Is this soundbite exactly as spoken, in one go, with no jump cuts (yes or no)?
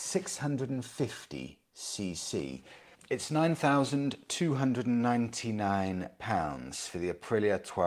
no